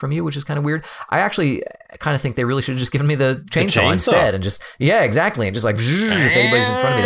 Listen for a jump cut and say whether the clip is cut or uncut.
cut